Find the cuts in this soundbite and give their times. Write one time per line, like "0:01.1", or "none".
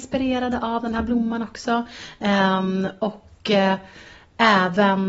none